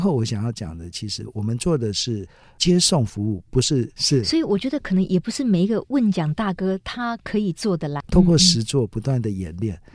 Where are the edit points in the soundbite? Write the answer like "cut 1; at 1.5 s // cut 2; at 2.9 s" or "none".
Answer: cut 1; at 4.0 s // cut 2; at 8.0 s